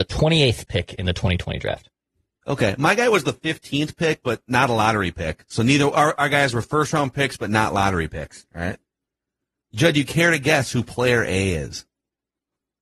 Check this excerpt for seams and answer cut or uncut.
uncut